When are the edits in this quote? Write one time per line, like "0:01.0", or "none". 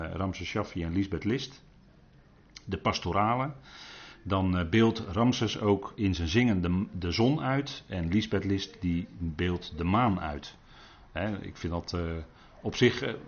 none